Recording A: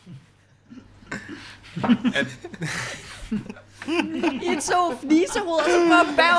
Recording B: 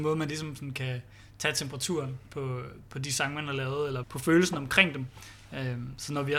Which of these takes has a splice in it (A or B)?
B